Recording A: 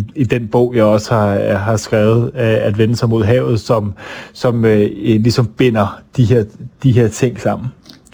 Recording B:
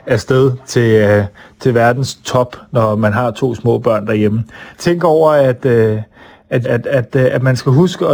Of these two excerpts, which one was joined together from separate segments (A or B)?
B